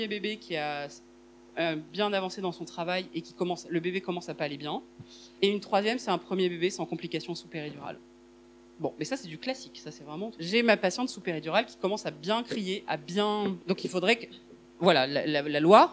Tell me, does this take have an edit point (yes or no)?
no